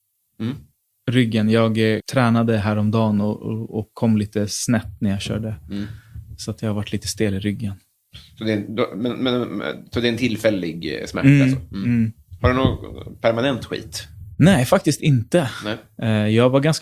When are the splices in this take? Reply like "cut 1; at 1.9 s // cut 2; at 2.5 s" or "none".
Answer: cut 1; at 2.0 s